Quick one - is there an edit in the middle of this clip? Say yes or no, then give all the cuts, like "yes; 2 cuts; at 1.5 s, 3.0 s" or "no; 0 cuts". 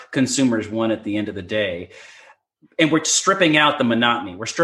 no; 0 cuts